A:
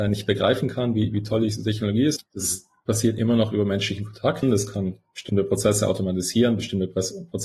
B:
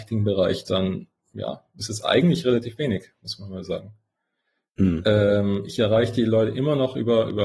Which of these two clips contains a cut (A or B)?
A